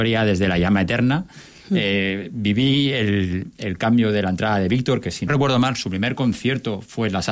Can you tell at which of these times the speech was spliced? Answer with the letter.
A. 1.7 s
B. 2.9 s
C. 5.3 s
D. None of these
C